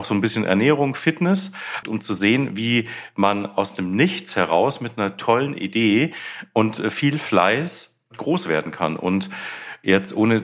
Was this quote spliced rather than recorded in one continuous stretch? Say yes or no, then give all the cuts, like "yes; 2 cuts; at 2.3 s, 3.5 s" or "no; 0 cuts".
yes; 1 cut; at 1.8 s